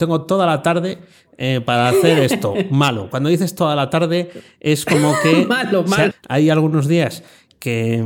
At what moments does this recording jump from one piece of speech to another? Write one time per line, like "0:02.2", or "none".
0:06.1

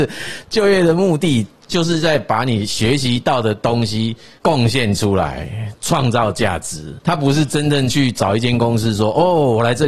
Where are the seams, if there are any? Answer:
none

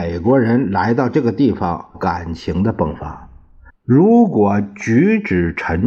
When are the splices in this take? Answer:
0:01.9
0:03.7

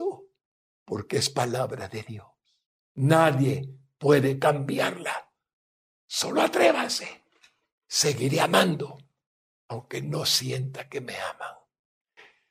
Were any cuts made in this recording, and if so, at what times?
none

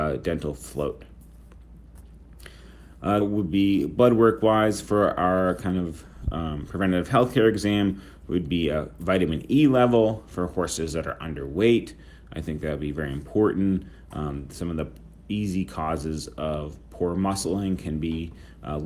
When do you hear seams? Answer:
0:03.2

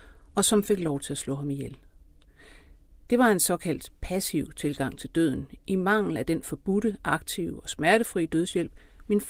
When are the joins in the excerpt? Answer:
none

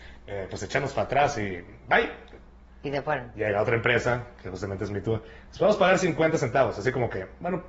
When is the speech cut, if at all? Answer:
none

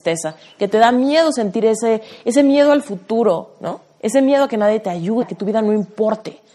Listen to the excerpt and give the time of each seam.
0:04.0
0:05.2

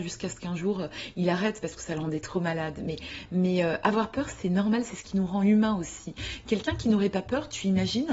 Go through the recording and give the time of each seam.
none

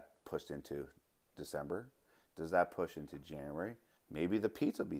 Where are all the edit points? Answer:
0:04.0

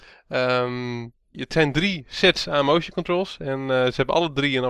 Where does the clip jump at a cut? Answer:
0:01.3

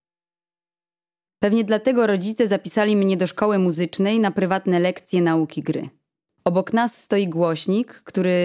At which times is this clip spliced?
0:01.2
0:06.3

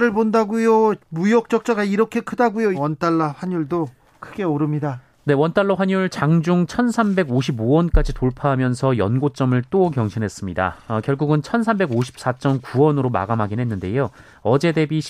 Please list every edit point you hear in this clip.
0:02.7

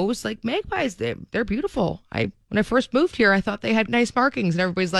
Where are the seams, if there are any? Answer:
0:02.4
0:03.9

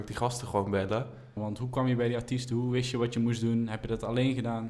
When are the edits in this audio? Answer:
0:01.4

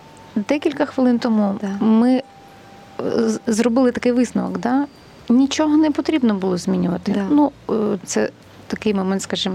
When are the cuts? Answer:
0:03.5
0:08.0

